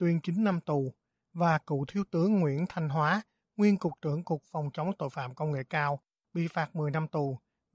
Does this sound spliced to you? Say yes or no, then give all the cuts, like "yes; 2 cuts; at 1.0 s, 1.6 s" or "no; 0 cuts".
no; 0 cuts